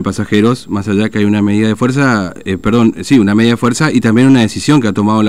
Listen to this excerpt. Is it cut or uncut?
uncut